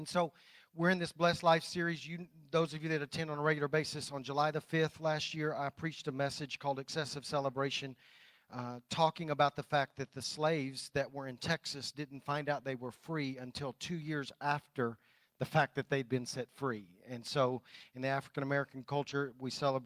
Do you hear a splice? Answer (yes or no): no